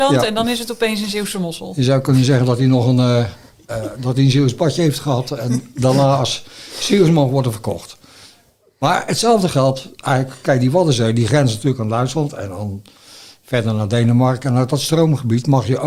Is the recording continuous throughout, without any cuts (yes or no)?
yes